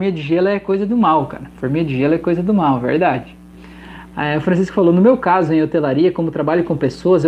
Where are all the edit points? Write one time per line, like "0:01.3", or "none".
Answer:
none